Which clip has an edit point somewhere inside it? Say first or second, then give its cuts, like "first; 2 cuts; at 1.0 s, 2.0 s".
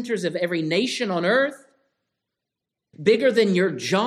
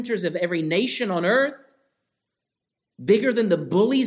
first; 1 cut; at 2.9 s